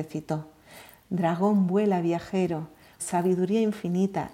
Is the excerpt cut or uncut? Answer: cut